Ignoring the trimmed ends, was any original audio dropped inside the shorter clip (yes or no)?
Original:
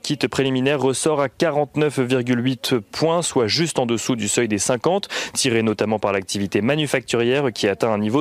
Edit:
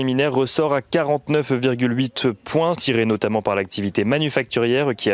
yes